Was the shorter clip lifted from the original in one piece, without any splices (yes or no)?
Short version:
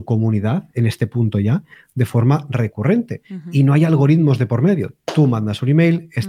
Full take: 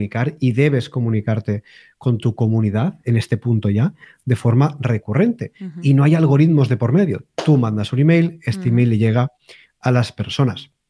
yes